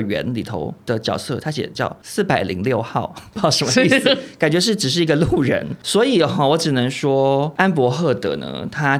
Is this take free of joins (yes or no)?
yes